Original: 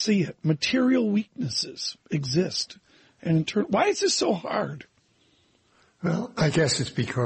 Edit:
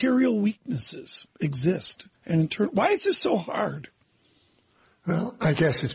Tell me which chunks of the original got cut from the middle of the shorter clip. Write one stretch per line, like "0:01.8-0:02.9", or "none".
0:02.9-0:03.1